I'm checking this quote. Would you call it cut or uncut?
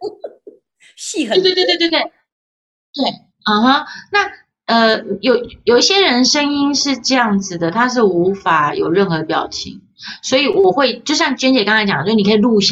uncut